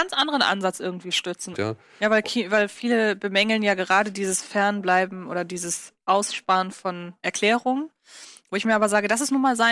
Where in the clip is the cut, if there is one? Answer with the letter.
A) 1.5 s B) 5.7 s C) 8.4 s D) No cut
A